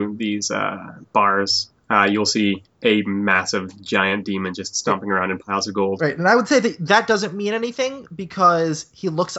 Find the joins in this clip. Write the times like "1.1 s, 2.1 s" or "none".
none